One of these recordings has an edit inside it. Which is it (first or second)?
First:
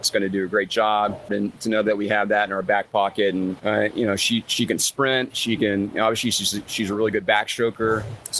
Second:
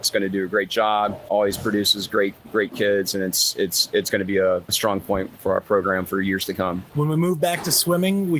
first